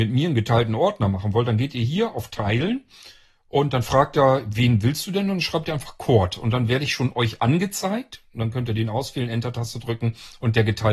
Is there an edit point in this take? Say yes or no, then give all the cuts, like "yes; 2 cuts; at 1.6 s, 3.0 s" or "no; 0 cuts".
no; 0 cuts